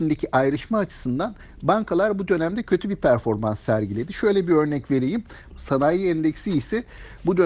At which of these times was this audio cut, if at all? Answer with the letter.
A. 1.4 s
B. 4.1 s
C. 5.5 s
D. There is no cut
C